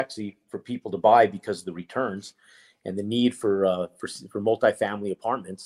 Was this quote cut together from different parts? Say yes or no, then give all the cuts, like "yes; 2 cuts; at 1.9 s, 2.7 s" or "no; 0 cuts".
no; 0 cuts